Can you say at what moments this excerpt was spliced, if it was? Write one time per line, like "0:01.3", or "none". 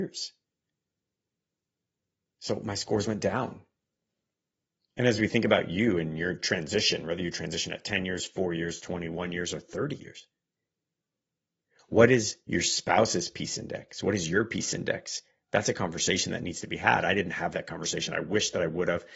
none